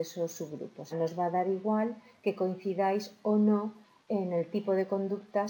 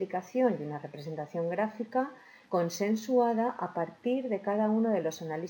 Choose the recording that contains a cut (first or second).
first